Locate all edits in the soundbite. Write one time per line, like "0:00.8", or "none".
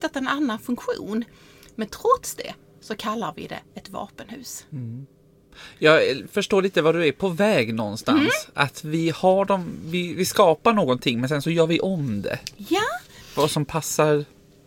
none